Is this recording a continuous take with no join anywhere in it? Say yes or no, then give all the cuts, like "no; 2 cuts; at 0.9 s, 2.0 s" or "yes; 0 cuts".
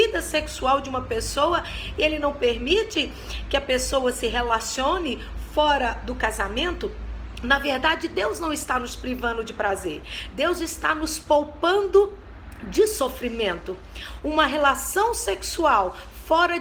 yes; 0 cuts